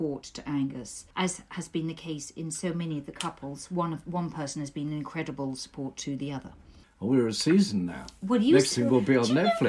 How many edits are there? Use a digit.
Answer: 2